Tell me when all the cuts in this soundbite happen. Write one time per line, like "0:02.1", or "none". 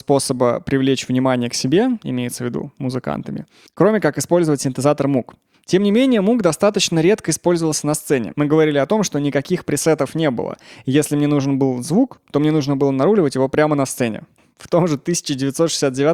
0:08.3